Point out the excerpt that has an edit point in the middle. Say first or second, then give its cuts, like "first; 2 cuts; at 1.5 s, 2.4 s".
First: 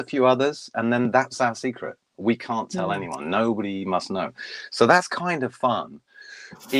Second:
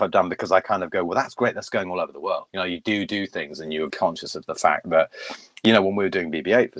second; 2 cuts; at 2.5 s, 3.9 s